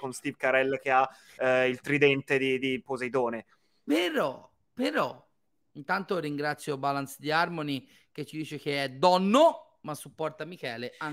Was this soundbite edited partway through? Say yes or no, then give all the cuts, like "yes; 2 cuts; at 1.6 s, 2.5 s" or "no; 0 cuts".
no; 0 cuts